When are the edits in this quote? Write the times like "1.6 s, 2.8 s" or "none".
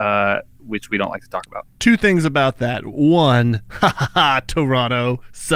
none